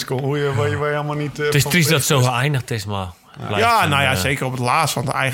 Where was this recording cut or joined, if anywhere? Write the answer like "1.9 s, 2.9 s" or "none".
none

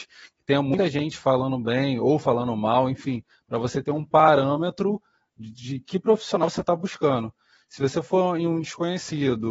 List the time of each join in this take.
none

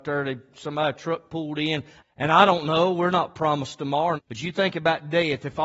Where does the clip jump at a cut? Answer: 2.0 s, 4.2 s

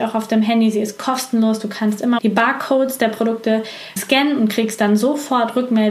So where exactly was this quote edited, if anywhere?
2.2 s, 4.0 s

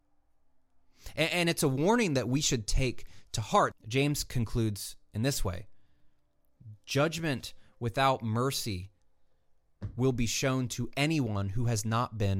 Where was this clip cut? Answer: 3.7 s

